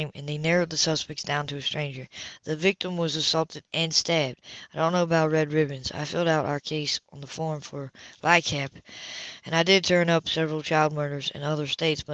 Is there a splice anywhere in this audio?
no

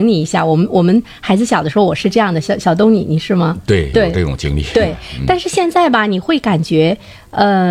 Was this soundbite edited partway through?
yes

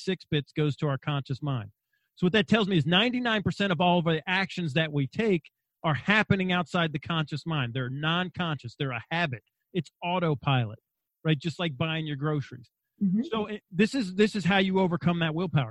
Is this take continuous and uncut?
yes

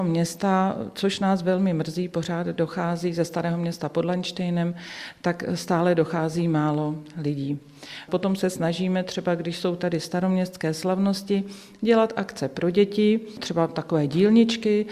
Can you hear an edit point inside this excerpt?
yes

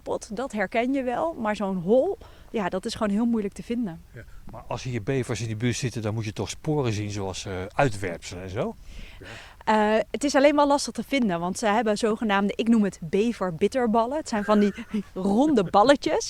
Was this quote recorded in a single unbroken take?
no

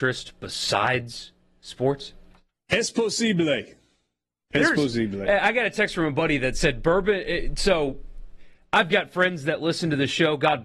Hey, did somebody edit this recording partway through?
no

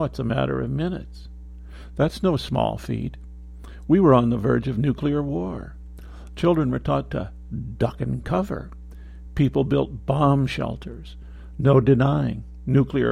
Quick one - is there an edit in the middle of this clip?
no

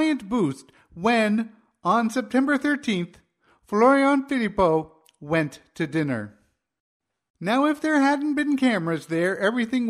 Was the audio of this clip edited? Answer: no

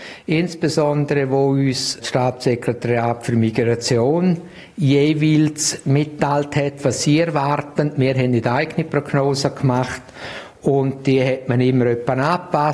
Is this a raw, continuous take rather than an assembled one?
yes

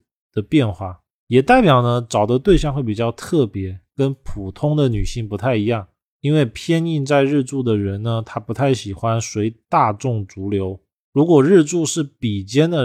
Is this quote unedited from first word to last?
yes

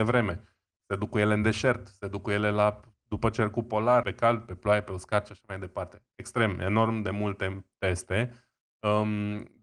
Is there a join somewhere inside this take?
yes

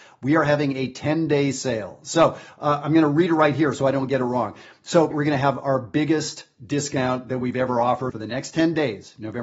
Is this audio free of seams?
no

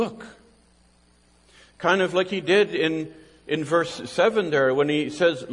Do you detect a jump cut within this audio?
no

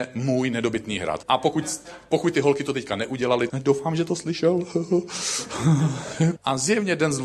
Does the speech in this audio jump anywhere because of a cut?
yes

